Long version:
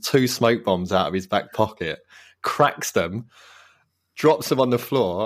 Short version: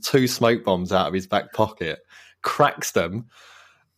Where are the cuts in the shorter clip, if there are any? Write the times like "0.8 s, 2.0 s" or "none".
none